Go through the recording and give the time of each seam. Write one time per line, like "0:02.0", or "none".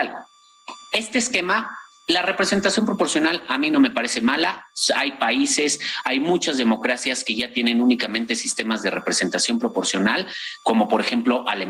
none